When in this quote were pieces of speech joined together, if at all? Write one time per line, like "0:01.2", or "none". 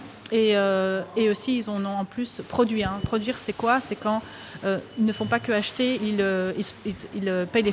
0:06.0